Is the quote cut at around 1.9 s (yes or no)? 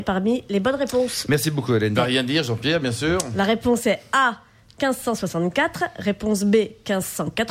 yes